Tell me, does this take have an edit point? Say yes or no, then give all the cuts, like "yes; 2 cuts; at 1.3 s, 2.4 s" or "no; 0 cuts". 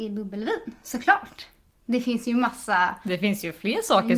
no; 0 cuts